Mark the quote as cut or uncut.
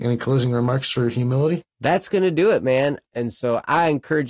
cut